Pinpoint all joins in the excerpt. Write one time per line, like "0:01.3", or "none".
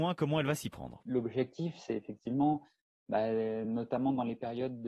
none